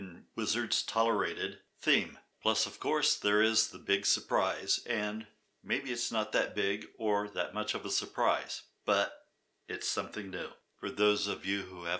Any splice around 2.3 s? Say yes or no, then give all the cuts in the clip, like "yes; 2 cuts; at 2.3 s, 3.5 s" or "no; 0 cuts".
yes; 2 cuts; at 2.3 s, 10.7 s